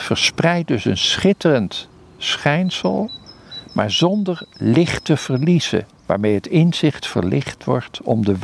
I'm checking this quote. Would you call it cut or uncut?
cut